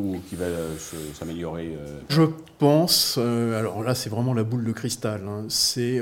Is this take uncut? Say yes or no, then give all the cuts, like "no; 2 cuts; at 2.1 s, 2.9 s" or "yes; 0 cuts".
no; 1 cut; at 2.1 s